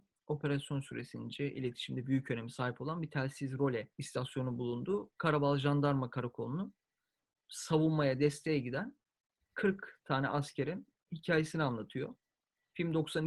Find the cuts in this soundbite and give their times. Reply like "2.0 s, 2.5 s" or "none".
3.9 s